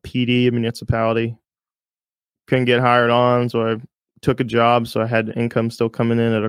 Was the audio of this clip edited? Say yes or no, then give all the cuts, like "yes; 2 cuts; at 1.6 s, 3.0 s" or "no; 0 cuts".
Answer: no; 0 cuts